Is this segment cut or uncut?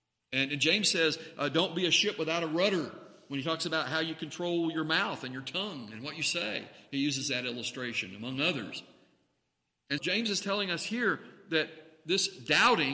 cut